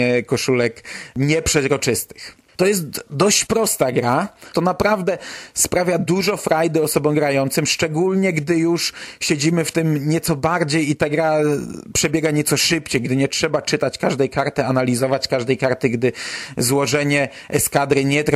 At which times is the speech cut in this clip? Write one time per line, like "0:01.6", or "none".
0:02.5
0:04.5

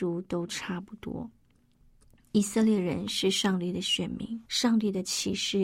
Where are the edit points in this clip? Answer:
0:04.4

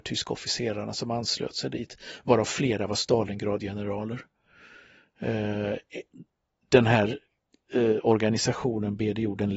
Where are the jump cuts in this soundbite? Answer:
none

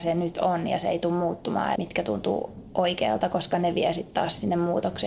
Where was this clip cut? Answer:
0:01.8

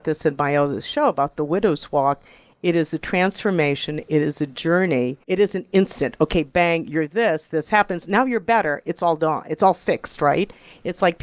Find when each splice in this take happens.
0:05.2

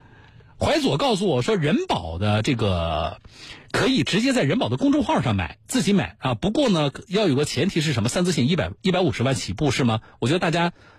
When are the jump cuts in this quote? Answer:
none

